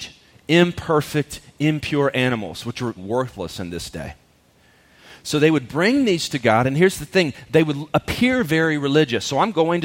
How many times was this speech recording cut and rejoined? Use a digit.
1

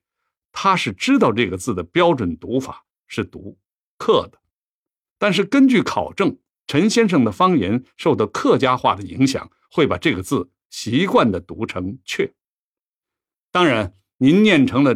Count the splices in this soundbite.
1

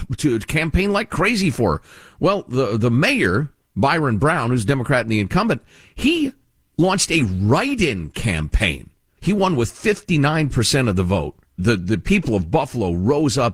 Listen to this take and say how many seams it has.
2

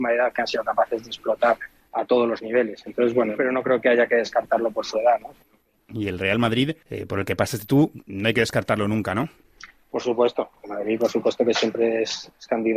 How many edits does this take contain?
1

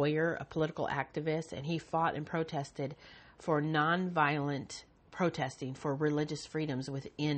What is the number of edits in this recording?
0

